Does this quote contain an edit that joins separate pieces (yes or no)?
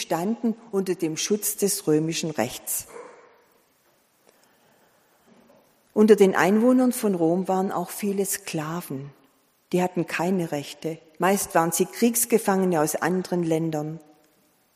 no